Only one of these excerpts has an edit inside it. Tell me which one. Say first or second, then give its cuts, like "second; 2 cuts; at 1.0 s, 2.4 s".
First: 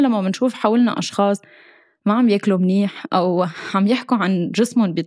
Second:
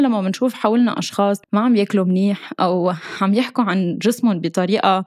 second; 1 cut; at 1.4 s